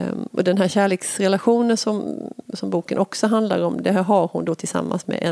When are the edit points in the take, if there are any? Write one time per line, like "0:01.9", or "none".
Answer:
none